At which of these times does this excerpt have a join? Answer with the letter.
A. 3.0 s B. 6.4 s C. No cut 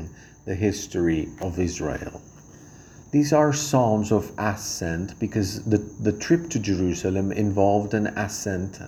A